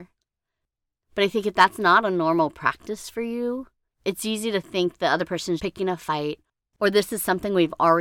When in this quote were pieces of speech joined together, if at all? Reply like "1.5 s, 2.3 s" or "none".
1.0 s, 5.6 s